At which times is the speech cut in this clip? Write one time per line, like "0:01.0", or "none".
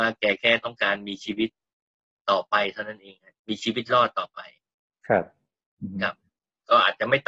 none